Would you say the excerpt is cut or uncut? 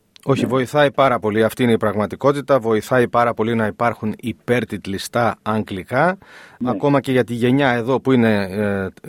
uncut